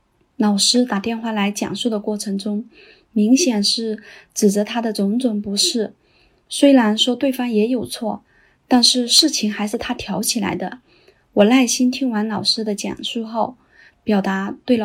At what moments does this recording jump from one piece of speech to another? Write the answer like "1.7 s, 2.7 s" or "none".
none